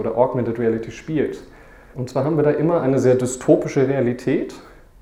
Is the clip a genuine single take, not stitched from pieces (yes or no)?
no